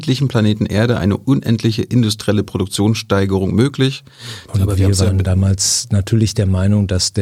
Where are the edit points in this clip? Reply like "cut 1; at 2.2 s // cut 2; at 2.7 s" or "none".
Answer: cut 1; at 4.5 s